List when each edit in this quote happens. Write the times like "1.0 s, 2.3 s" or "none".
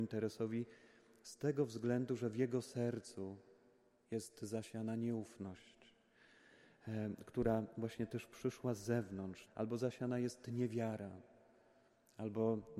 9.5 s